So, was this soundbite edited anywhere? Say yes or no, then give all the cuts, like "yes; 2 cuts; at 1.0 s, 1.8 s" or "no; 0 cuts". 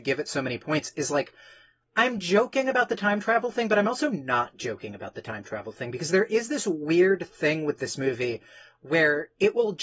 no; 0 cuts